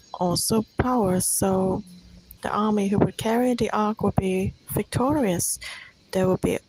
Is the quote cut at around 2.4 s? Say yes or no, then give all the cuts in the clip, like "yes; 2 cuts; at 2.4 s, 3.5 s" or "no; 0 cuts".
yes; 1 cut; at 2.4 s